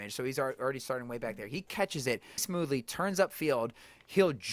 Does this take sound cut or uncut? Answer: cut